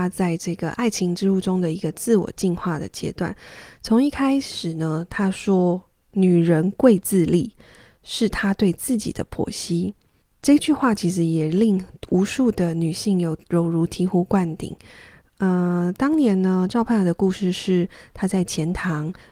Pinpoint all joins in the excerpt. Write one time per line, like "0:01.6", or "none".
none